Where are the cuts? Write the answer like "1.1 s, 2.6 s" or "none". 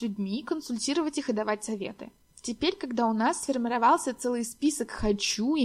2.3 s